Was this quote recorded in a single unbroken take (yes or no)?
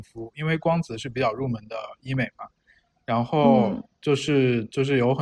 yes